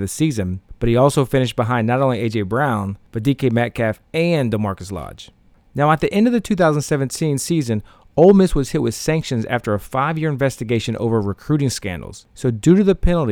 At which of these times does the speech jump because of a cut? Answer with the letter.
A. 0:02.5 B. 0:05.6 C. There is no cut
C